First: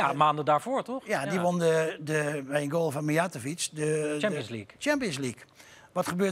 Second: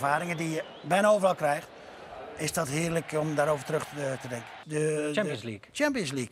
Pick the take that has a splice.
second; 1 cut; at 4.6 s

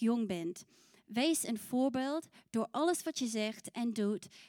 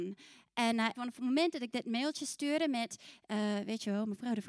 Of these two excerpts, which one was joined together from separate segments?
second; 1 cut; at 0.9 s

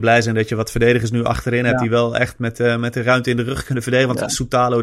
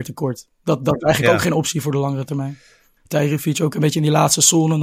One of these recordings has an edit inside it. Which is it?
second; 1 cut; at 3.0 s

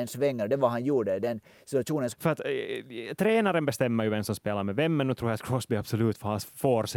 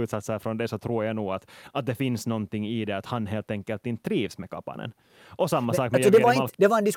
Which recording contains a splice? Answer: first; 1 cut; at 2.1 s

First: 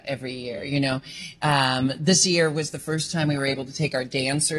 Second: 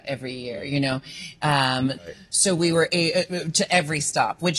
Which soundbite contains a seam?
second; 1 cut; at 2.0 s

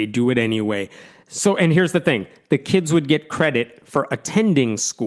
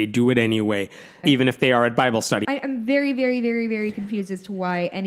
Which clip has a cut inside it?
second; 2 cuts; at 1.2 s, 2.4 s

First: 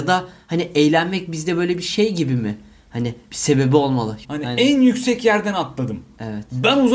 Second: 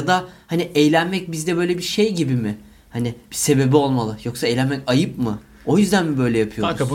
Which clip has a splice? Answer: first; 1 cut; at 4.2 s

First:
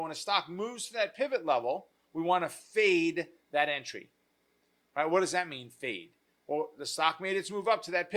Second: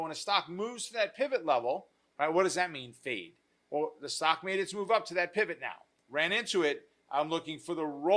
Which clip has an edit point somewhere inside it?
second; 1 cut; at 2.1 s

